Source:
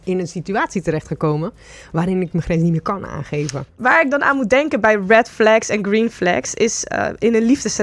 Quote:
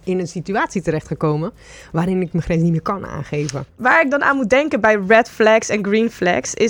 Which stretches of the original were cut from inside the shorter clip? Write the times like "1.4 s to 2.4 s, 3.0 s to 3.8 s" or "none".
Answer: none